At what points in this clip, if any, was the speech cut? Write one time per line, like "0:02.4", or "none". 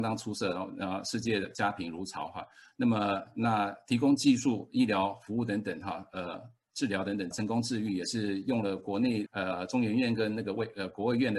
0:07.3
0:09.3